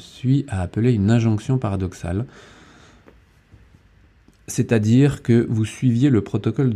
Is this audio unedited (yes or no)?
yes